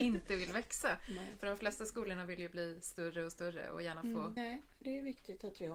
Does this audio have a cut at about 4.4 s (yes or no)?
yes